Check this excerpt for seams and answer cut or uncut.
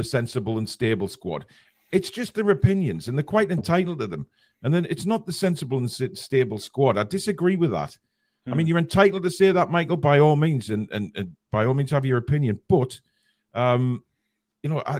uncut